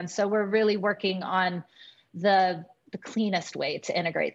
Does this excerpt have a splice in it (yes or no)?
no